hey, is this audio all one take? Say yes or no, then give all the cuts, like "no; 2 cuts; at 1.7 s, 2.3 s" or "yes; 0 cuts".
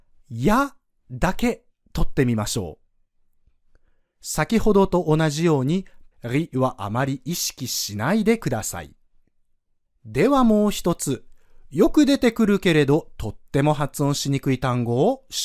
no; 2 cuts; at 6.1 s, 9.9 s